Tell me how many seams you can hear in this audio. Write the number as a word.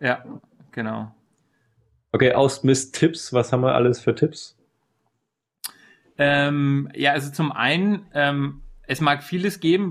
zero